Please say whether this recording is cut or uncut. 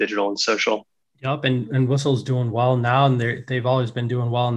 uncut